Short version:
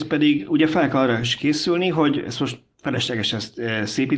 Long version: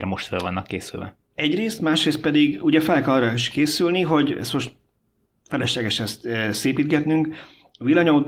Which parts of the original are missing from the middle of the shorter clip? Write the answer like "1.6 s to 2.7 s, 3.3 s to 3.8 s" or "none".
4.8 s to 5.4 s